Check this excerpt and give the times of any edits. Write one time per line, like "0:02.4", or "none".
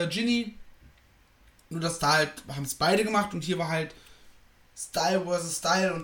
none